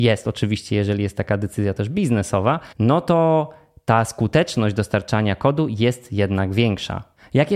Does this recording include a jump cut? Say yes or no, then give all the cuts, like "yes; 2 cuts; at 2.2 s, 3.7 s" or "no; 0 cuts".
yes; 1 cut; at 2.7 s